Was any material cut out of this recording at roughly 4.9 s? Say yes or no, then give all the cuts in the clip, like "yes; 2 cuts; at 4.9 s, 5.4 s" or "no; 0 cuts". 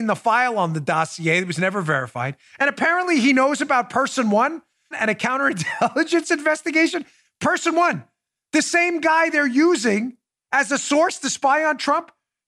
yes; 1 cut; at 4.9 s